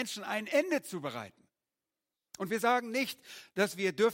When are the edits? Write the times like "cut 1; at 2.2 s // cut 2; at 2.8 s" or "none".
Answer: cut 1; at 2.3 s